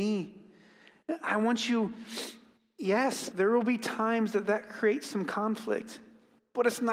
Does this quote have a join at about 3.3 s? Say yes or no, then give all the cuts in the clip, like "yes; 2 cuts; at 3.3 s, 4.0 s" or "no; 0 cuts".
yes; 1 cut; at 3.3 s